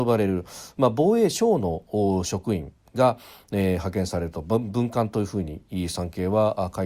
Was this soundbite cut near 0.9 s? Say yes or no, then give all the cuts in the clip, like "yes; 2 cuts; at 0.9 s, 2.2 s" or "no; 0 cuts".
no; 0 cuts